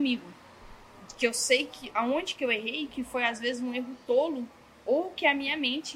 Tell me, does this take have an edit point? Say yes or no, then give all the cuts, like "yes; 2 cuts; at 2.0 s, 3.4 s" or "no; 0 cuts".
no; 0 cuts